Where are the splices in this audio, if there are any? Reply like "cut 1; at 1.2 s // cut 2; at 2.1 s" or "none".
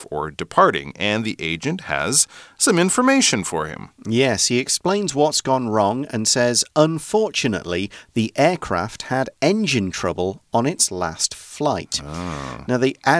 none

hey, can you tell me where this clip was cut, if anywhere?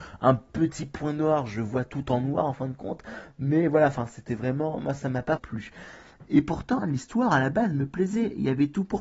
cut 1; at 5.4 s // cut 2; at 6.8 s

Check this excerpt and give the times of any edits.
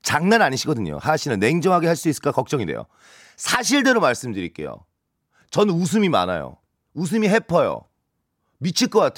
none

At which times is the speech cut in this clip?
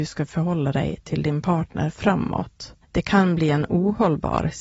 cut 1; at 2.8 s

